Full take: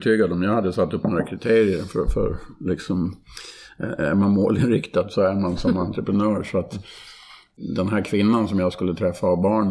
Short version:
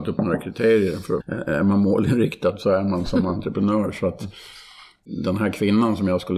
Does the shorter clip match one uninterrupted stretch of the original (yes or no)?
no